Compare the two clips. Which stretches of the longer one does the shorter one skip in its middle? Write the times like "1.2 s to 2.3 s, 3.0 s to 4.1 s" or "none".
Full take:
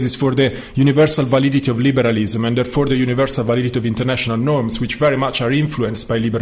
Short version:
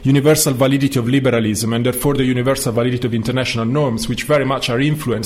none